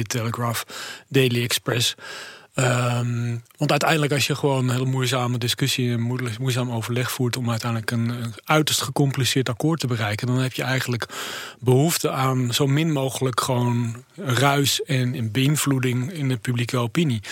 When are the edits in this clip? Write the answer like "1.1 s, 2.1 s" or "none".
none